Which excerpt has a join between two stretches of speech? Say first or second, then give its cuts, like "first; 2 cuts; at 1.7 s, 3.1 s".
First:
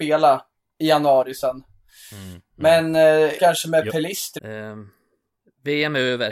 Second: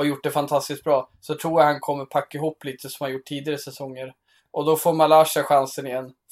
first; 2 cuts; at 3.4 s, 4.4 s